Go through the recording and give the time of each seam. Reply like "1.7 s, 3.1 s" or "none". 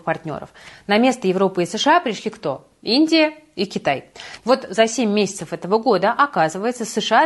4.4 s